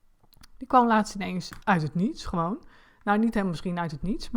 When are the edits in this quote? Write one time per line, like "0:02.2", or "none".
0:01.6